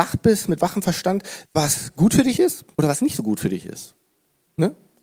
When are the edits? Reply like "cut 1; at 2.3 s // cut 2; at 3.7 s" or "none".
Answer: cut 1; at 1.4 s // cut 2; at 2.7 s